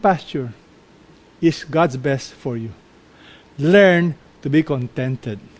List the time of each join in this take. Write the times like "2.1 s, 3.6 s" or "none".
none